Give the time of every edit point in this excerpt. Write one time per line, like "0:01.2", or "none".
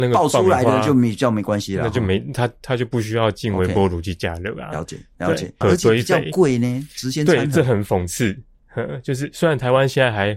0:05.6